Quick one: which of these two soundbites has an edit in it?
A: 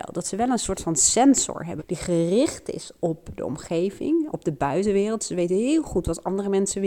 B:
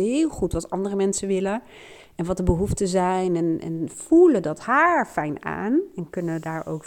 A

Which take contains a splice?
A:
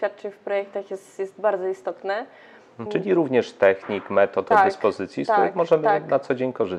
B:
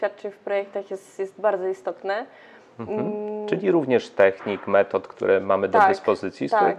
A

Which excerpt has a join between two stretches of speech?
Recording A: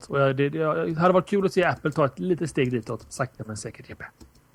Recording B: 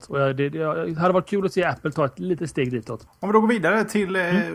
B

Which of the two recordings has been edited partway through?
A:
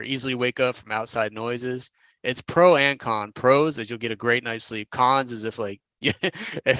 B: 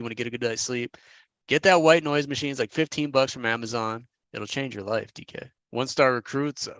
B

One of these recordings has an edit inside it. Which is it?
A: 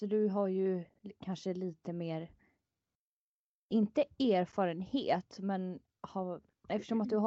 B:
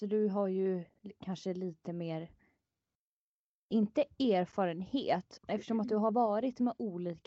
B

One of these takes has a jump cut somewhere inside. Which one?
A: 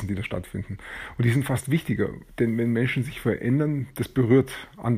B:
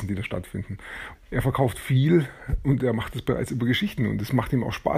B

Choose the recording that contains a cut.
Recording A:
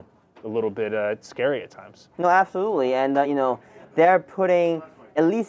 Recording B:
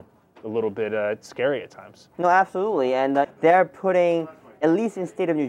B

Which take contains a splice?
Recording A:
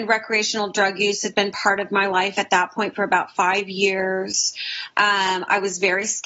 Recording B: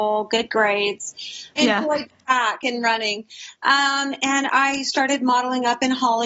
B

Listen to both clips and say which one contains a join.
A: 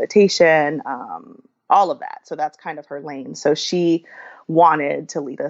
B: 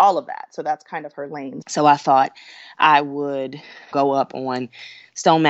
B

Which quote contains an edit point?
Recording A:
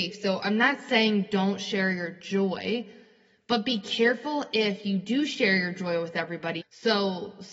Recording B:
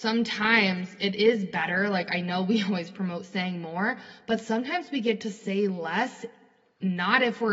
A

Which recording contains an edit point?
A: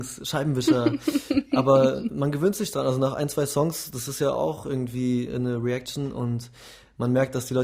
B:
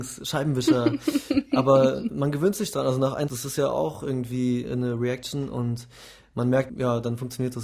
B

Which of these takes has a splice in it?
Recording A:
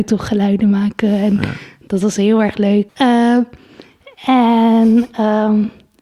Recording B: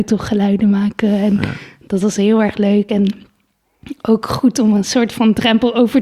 A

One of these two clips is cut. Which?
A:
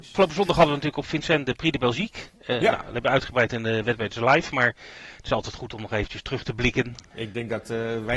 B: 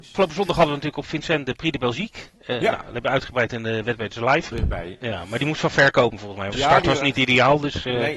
B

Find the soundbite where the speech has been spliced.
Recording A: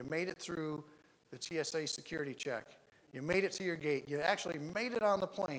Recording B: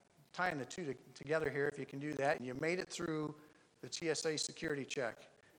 B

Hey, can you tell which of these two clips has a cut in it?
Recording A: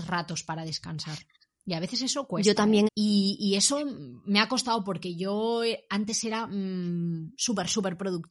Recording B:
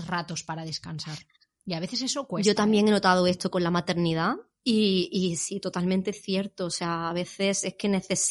A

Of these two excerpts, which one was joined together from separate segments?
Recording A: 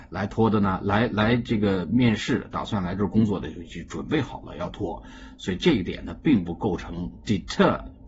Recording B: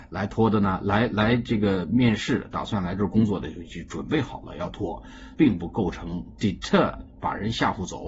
B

